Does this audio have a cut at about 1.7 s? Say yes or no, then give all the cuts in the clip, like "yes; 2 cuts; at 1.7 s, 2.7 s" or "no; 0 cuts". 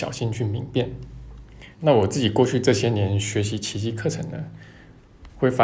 yes; 1 cut; at 1.7 s